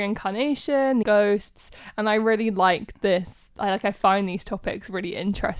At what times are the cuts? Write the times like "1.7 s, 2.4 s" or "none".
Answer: 1.0 s